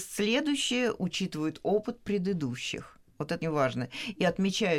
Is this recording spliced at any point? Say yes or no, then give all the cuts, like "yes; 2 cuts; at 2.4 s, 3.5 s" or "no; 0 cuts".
yes; 1 cut; at 3.4 s